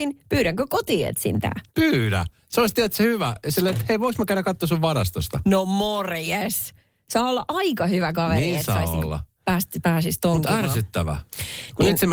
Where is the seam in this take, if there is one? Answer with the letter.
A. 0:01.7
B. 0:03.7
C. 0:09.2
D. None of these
A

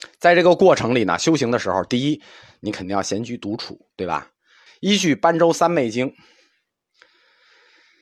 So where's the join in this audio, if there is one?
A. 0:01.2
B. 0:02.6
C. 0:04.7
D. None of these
C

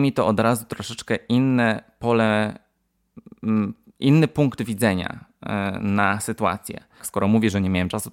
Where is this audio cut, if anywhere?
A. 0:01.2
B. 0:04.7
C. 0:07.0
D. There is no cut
C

